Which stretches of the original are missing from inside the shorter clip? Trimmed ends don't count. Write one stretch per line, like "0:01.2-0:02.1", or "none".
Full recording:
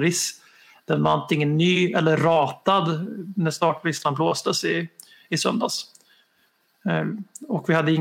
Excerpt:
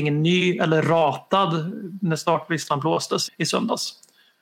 0:04.6-0:05.2